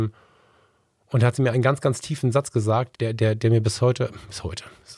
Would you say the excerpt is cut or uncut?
cut